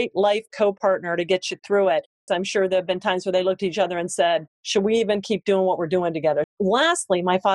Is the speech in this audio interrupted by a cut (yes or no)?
yes